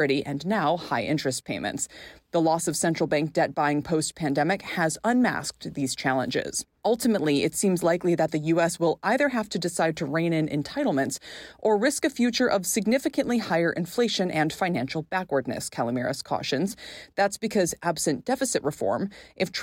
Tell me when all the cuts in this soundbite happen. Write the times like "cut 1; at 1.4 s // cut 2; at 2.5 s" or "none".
none